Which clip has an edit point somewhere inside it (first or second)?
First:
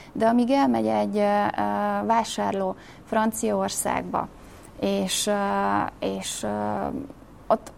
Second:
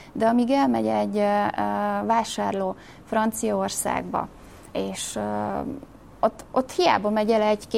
second